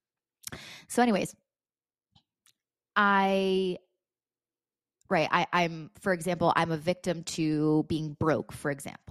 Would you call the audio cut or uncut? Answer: uncut